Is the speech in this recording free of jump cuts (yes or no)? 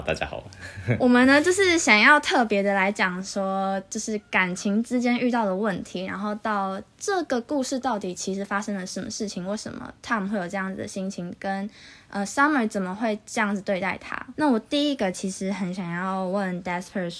no